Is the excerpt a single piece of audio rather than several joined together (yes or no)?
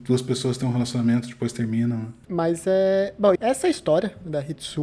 no